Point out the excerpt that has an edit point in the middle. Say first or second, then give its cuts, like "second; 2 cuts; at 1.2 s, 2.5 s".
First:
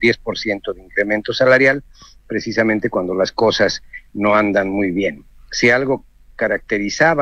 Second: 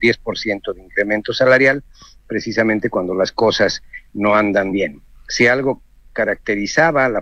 second; 1 cut; at 4.7 s